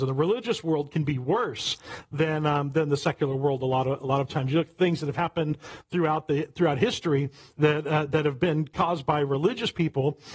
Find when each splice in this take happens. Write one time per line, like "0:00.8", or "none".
none